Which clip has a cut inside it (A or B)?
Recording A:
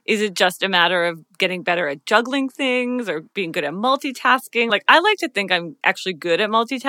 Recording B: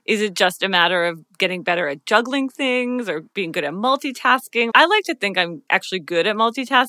B